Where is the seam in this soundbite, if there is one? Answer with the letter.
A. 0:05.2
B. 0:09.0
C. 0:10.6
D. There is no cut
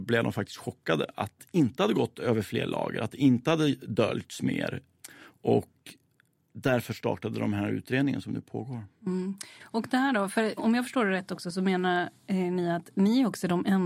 C